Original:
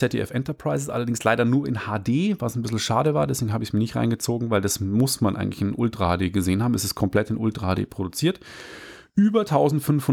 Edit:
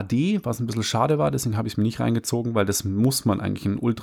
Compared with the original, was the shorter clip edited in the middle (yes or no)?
no